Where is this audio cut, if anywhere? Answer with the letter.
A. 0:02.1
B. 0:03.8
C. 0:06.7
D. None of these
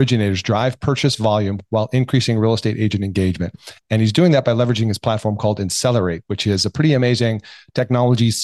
D